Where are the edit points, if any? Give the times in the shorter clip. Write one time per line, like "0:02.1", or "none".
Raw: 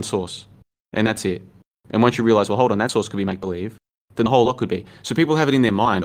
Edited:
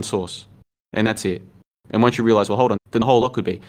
0:02.8